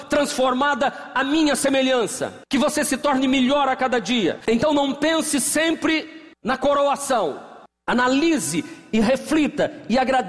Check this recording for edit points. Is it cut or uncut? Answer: cut